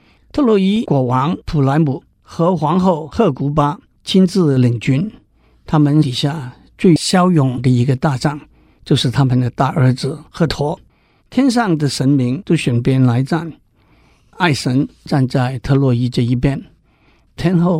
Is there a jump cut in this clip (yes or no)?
yes